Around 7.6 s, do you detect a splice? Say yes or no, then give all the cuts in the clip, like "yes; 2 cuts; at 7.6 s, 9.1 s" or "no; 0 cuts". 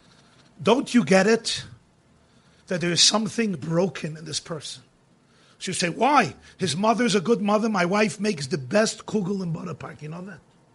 no; 1 cut; at 3.5 s